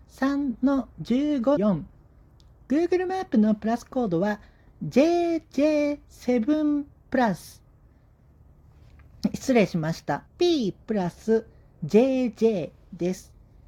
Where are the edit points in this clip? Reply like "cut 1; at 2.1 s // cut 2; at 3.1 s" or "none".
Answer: cut 1; at 1.6 s // cut 2; at 10.3 s